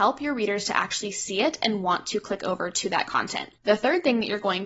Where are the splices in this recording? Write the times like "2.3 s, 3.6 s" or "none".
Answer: 3.6 s